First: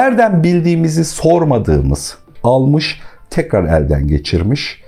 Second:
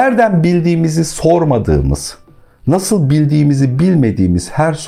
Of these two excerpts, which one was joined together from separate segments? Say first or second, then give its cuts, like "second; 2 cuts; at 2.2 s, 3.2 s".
first; 1 cut; at 2.4 s